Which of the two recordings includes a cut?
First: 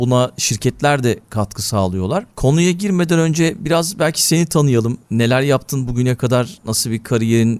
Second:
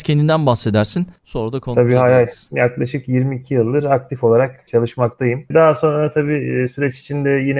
second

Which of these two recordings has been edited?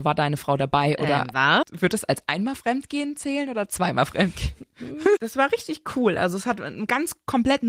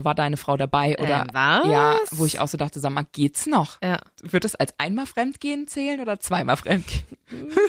first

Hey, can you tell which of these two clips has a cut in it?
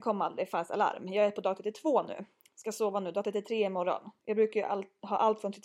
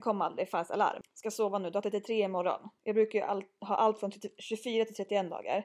second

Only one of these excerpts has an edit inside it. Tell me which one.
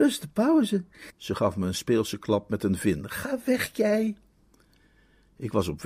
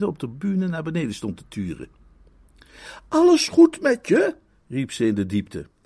first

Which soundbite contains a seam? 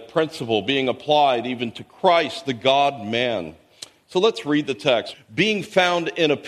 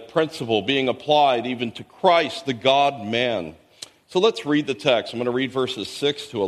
first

